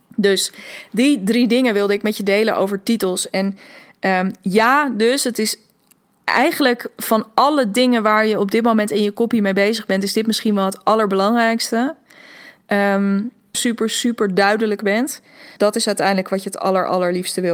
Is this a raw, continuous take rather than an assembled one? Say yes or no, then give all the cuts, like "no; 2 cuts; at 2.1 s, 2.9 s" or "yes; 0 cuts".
no; 2 cuts; at 13.5 s, 15.6 s